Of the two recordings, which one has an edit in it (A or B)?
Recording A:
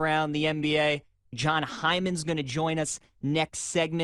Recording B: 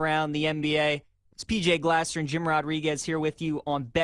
A